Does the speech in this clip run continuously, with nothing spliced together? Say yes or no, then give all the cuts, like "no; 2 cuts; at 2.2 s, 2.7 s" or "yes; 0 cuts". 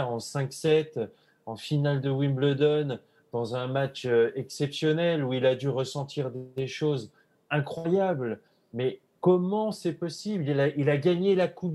yes; 0 cuts